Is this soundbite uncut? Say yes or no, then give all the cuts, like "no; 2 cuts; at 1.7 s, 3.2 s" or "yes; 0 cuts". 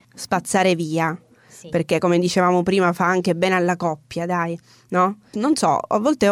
no; 1 cut; at 5.3 s